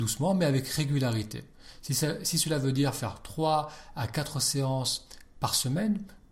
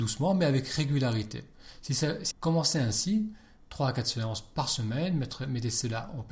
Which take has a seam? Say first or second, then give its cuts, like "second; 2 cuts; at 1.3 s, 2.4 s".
second; 1 cut; at 2.3 s